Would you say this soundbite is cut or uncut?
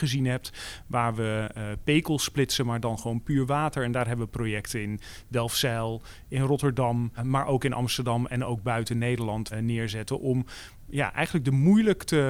cut